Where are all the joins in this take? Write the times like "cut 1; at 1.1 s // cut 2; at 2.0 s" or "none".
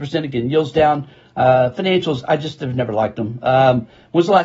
none